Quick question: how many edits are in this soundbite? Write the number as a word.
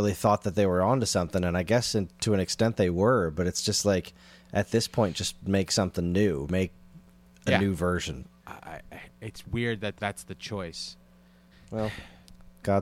three